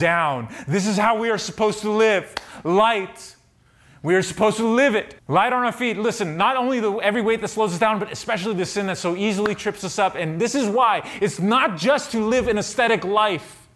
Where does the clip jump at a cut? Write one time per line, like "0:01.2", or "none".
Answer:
0:05.2